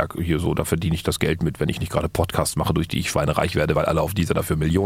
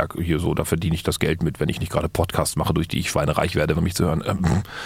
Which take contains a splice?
second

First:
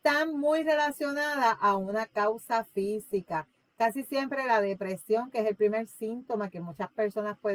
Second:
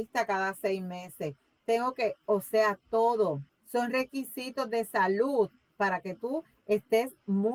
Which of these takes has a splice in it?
second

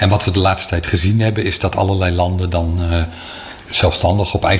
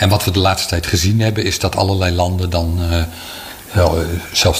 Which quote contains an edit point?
first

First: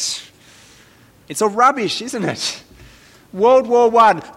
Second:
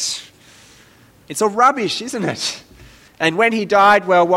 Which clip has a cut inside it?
second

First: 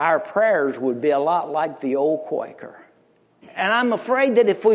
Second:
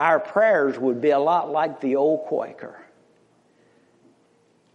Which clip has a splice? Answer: first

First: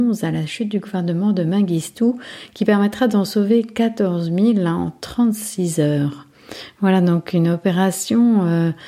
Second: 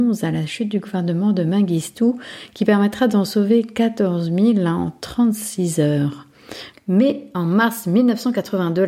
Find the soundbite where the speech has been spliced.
second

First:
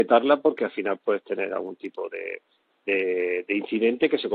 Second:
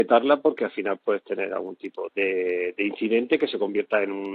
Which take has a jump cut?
second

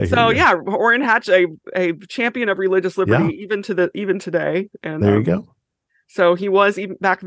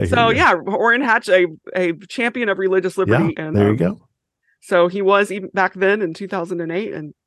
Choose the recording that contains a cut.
second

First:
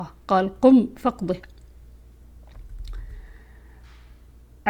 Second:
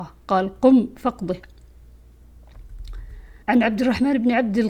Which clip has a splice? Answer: second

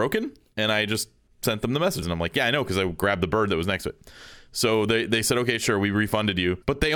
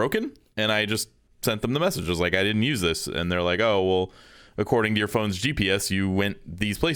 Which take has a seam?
first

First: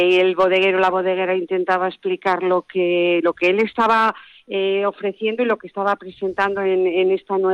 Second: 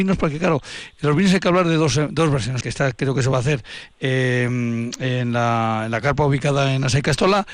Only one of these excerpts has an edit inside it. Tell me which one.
second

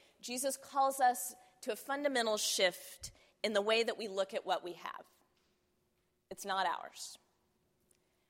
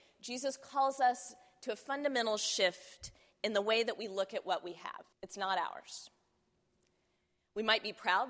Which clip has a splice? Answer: second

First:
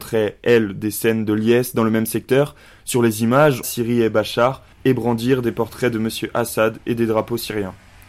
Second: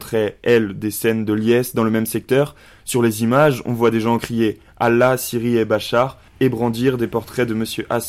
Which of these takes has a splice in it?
first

